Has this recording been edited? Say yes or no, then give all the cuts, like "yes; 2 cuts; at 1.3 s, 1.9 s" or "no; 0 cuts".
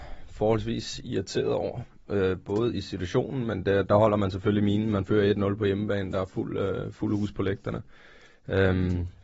no; 0 cuts